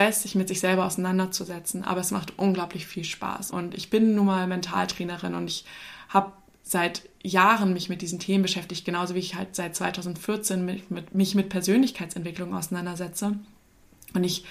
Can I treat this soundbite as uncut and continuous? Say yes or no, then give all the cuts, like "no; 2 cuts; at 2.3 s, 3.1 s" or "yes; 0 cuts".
no; 1 cut; at 3.5 s